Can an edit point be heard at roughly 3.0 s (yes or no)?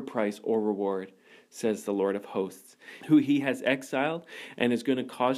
yes